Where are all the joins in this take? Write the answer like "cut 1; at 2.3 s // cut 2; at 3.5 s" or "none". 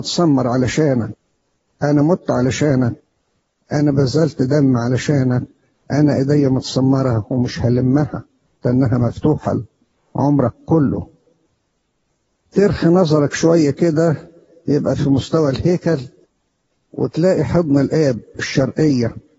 none